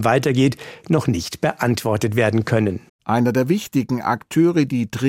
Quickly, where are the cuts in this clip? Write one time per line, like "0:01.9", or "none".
0:02.9